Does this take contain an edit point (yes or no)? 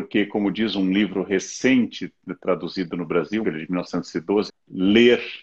yes